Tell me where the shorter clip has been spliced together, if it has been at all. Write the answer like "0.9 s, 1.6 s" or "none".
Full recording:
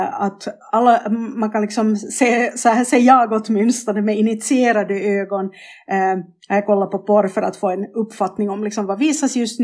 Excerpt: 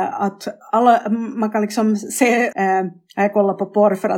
2.5 s